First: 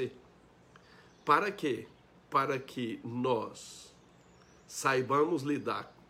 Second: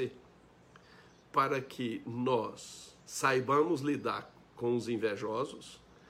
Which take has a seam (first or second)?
second